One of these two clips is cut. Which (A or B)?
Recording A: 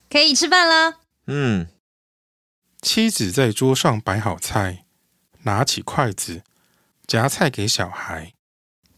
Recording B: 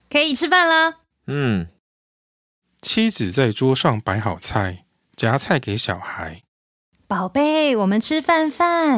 B